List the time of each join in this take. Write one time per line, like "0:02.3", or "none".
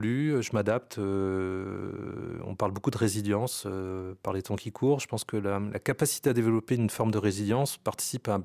none